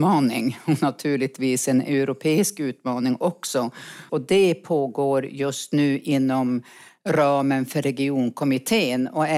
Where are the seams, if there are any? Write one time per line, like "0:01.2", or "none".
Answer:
0:04.1

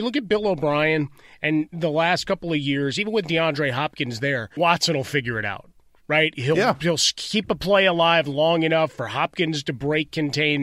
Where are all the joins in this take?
0:04.6

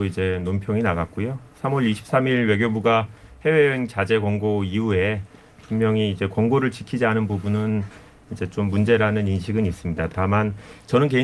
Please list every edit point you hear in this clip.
none

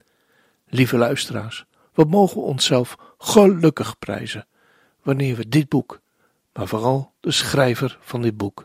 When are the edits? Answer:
none

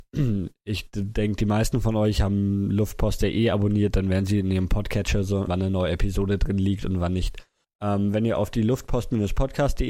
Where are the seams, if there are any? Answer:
0:05.5
0:07.6

